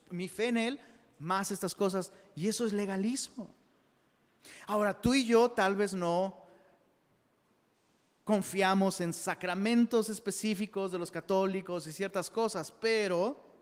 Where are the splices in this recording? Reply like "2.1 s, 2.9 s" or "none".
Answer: none